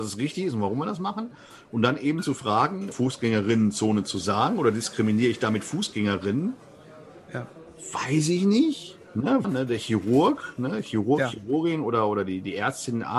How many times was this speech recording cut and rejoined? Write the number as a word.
two